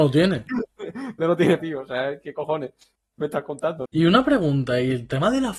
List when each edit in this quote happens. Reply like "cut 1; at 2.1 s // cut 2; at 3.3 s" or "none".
cut 1; at 1.6 s // cut 2; at 3.9 s